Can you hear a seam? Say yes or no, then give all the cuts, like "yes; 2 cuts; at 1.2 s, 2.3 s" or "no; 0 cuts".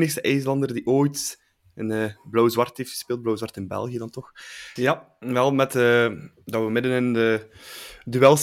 yes; 1 cut; at 4.8 s